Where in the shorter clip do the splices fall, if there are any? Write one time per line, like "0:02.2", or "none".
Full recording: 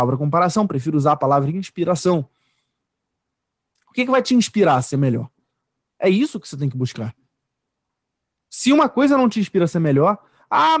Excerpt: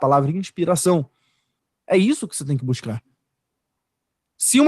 0:01.7